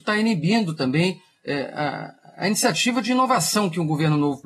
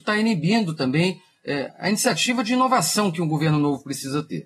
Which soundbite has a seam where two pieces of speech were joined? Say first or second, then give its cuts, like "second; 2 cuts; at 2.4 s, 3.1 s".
second; 1 cut; at 1.7 s